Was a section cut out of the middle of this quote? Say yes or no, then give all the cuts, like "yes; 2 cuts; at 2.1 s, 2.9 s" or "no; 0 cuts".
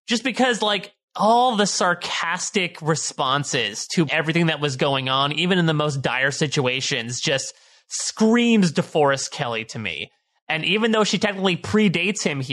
yes; 1 cut; at 4.1 s